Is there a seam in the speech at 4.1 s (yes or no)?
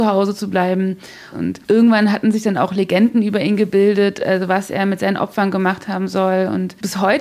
no